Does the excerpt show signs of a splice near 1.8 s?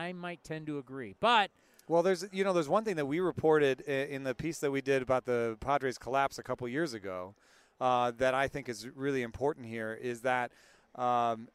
no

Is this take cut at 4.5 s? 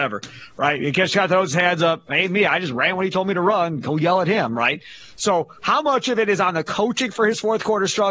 no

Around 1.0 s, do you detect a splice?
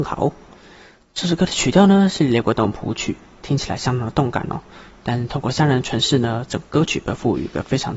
no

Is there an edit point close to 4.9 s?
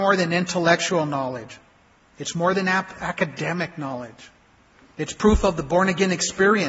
yes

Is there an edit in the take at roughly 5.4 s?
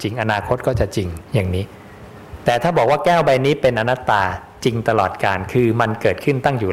no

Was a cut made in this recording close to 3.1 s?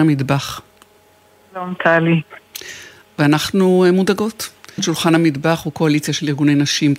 no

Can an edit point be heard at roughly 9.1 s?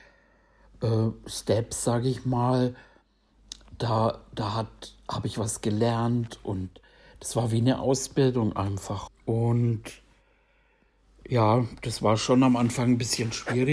yes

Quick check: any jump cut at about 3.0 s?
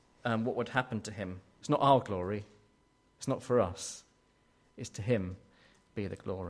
no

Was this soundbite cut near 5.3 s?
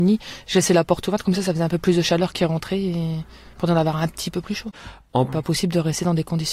yes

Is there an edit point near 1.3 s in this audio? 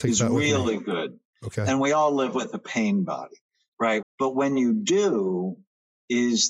yes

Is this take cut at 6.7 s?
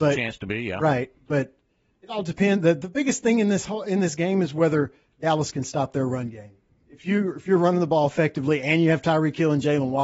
yes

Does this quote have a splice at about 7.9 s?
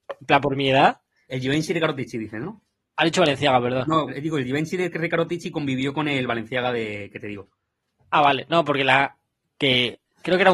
no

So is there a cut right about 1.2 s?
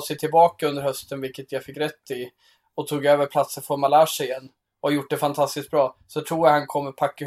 no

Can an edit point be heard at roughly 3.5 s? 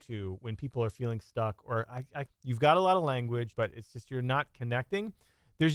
yes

